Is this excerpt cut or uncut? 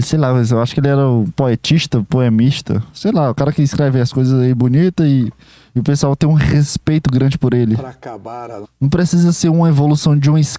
cut